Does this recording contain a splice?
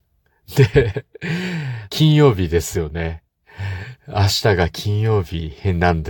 yes; 1 cut; at 1.9 s

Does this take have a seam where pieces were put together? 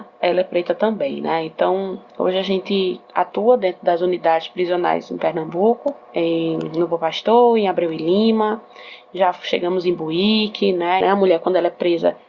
yes; 2 cuts; at 6.0 s, 11.0 s

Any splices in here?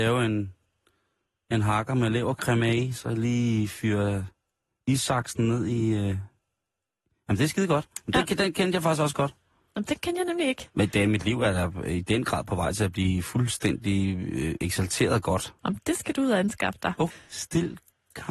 yes; 2 cuts; at 15.6 s, 17.1 s

